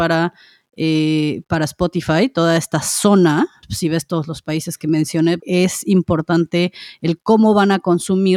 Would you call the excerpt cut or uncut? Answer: cut